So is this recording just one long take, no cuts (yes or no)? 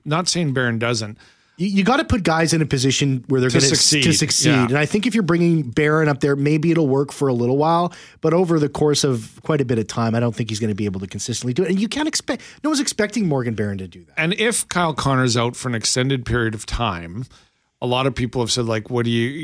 yes